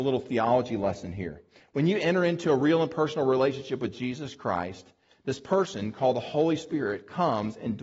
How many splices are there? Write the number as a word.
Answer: zero